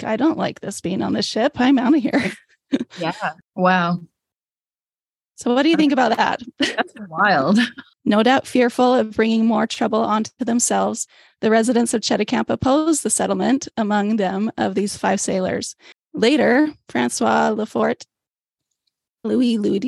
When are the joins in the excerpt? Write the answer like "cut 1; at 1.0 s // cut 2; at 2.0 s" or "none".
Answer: cut 1; at 3.4 s // cut 2; at 7.9 s // cut 3; at 15.9 s